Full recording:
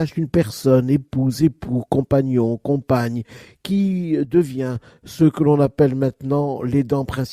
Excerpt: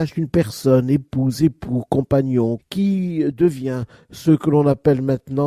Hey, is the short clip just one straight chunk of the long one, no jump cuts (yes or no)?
no